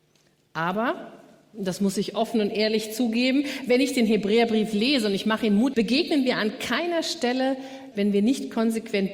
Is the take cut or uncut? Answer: cut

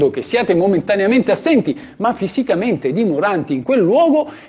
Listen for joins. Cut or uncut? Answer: uncut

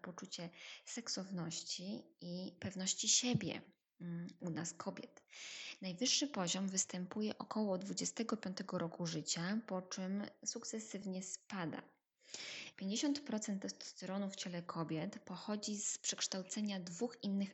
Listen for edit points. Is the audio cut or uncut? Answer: cut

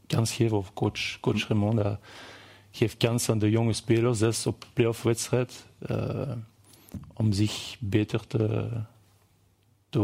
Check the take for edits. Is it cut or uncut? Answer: uncut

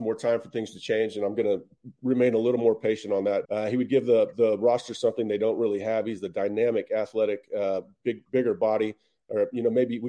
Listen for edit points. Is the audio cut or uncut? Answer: cut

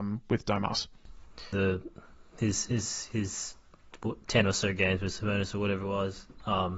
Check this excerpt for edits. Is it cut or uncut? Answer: cut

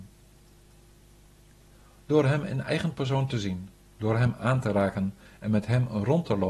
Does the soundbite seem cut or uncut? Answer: uncut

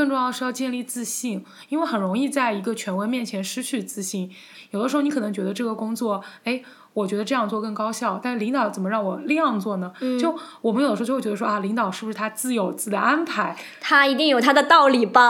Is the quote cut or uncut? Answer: uncut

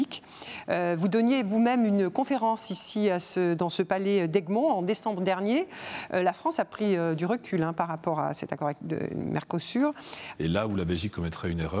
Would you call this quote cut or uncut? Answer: cut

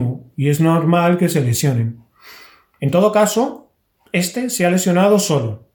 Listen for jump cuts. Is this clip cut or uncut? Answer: uncut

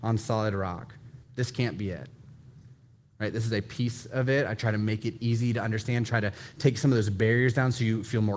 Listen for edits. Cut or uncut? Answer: cut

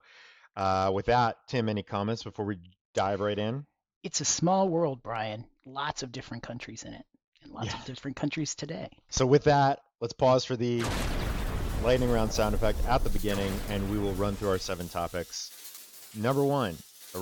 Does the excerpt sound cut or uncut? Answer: cut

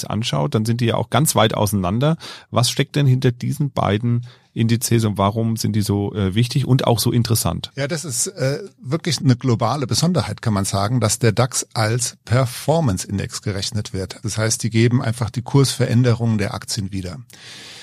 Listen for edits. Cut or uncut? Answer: cut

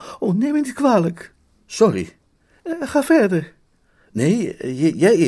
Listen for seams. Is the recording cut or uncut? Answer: uncut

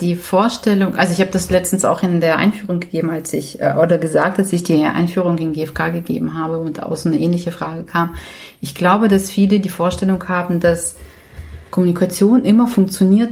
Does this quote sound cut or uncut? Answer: uncut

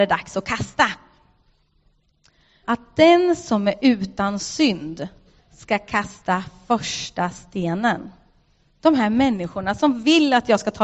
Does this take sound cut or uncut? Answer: cut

